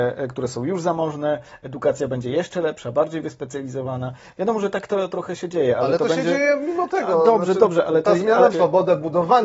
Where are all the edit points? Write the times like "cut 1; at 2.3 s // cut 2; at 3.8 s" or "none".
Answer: cut 1; at 8.5 s